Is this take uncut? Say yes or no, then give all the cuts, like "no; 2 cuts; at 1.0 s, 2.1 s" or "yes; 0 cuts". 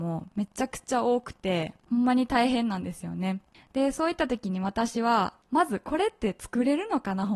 yes; 0 cuts